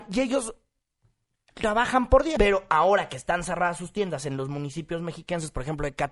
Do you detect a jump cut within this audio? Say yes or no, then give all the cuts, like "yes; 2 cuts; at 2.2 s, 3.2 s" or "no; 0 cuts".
yes; 1 cut; at 2.4 s